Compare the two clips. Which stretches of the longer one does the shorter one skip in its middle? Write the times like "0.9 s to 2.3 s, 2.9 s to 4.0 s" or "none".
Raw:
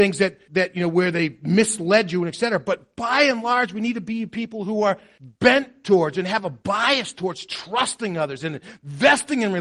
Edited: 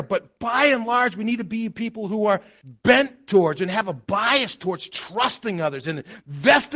none